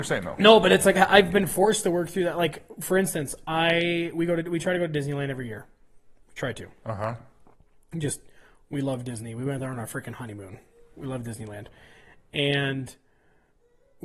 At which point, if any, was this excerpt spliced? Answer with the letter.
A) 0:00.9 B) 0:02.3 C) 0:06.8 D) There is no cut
A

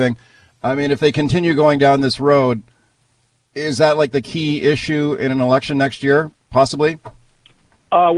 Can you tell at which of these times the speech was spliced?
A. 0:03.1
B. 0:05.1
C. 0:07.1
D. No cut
D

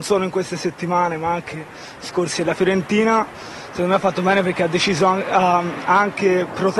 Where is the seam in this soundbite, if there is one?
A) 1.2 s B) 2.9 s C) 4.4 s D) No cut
D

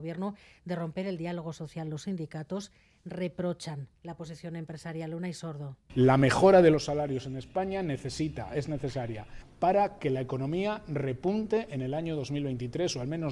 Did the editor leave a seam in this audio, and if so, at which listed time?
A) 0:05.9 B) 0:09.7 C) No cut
A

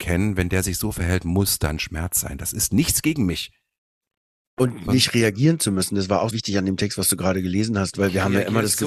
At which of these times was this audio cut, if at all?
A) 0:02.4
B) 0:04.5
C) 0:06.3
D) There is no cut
C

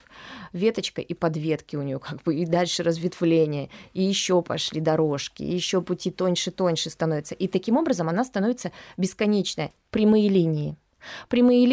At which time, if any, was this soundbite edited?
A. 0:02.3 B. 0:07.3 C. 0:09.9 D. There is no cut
C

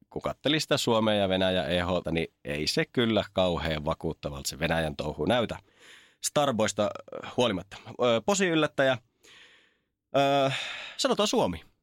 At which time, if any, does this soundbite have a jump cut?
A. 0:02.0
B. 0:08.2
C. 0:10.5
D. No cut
A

